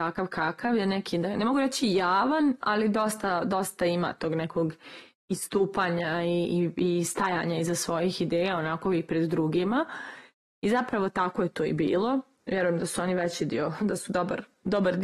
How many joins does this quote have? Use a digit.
2